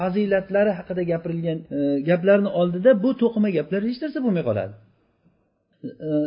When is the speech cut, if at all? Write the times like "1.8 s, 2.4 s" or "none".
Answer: 1.7 s